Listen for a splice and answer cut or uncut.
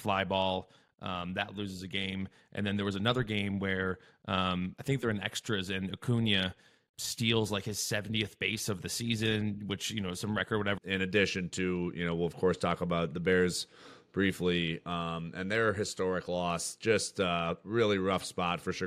cut